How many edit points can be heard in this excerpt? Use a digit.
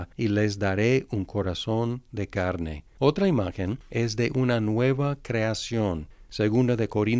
1